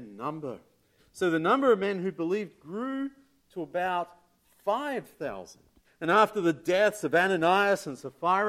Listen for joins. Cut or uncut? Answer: cut